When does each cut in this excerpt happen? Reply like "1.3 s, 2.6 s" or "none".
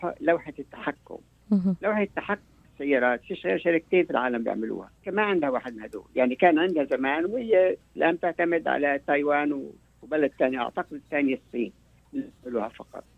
5.0 s